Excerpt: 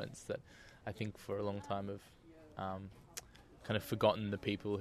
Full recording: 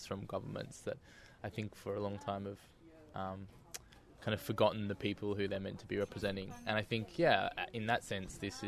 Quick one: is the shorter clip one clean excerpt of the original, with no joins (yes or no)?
yes